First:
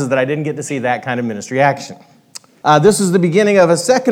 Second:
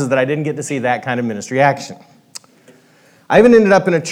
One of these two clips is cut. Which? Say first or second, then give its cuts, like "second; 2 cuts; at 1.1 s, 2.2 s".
first; 1 cut; at 2.6 s